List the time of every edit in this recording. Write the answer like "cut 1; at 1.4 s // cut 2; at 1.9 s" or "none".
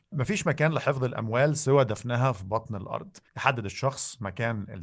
cut 1; at 3.3 s